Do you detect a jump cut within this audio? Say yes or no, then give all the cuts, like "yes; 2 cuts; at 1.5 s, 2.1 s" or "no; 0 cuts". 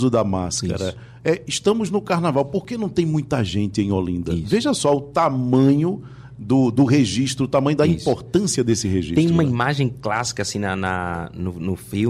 no; 0 cuts